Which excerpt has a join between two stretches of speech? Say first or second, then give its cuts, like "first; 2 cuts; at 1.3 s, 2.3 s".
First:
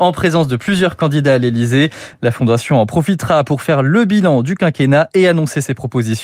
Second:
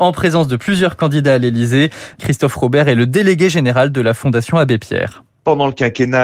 second; 1 cut; at 2.2 s